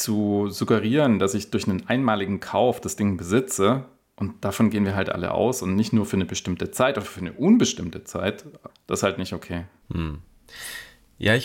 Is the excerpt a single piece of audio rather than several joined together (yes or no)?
no